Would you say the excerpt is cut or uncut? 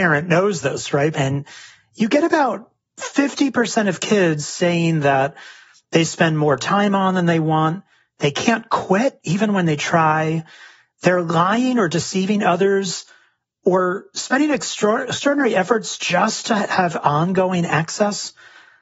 cut